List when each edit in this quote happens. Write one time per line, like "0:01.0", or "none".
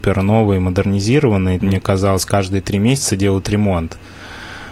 0:01.6

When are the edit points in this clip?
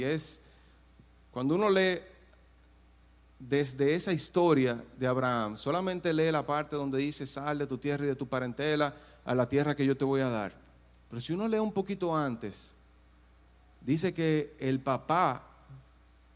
none

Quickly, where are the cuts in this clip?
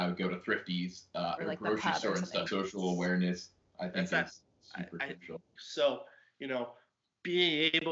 0:01.4
0:02.5
0:05.6

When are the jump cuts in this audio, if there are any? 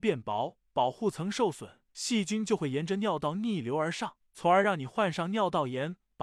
none

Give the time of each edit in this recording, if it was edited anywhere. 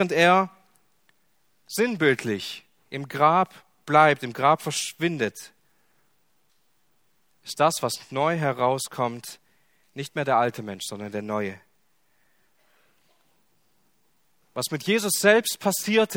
none

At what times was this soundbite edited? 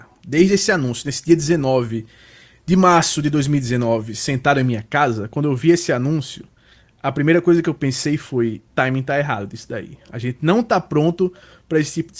0:08.7

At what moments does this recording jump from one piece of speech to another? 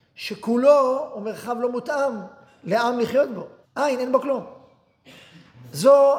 0:03.6

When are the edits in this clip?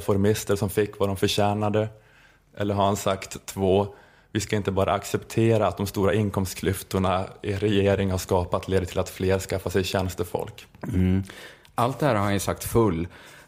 0:10.7

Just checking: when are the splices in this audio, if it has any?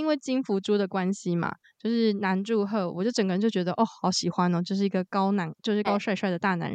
0:05.8

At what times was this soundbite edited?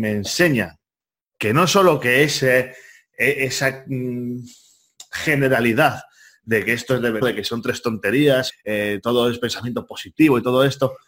0:07.2
0:08.5

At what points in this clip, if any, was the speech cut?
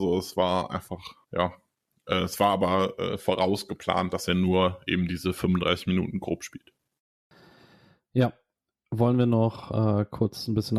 0:01.2

